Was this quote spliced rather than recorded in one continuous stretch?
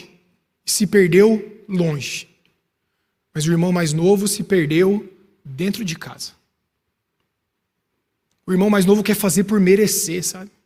no; 0 cuts

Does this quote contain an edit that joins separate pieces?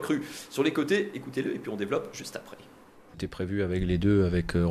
no; 0 cuts

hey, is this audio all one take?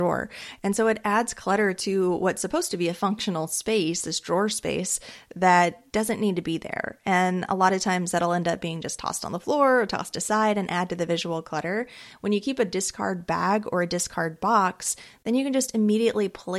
yes; 0 cuts

